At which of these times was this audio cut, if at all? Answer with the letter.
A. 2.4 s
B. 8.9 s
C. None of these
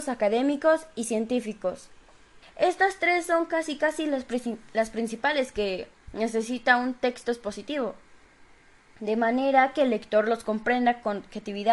A